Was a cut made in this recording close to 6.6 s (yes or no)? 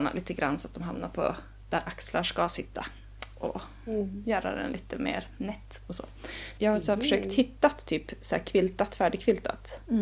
yes